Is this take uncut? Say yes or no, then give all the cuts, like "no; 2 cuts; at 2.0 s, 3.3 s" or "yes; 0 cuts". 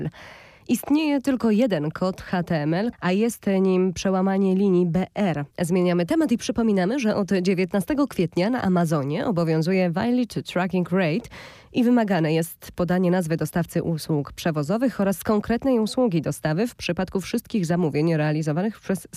no; 2 cuts; at 2.9 s, 5.5 s